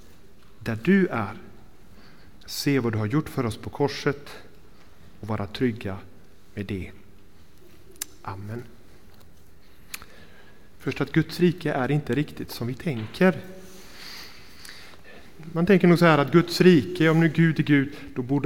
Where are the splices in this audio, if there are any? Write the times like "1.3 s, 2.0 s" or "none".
2.4 s